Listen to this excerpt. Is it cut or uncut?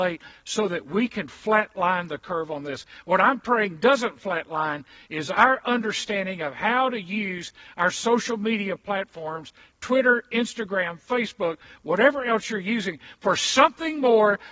uncut